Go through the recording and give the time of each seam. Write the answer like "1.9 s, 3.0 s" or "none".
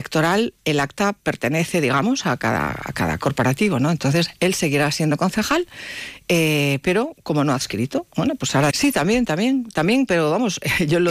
8.7 s